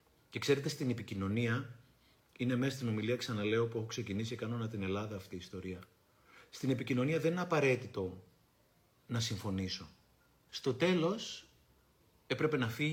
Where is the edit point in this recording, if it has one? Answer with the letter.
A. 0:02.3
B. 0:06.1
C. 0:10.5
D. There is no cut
C